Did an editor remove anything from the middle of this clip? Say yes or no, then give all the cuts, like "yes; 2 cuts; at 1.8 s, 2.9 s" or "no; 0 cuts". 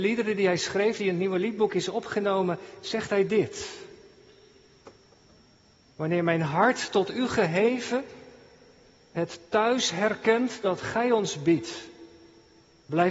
no; 0 cuts